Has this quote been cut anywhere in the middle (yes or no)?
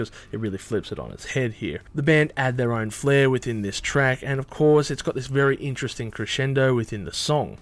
no